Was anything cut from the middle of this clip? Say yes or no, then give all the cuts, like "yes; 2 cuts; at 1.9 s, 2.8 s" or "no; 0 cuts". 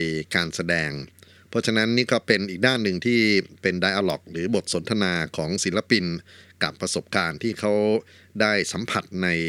no; 0 cuts